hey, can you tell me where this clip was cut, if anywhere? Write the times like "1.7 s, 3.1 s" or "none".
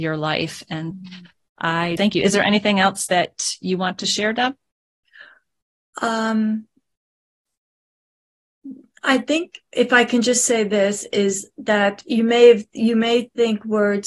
0.9 s, 2.0 s